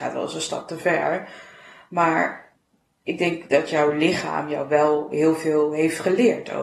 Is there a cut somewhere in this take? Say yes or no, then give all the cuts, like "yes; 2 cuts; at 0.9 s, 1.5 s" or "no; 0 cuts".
no; 0 cuts